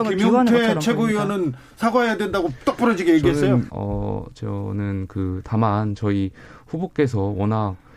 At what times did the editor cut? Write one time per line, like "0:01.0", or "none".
0:03.7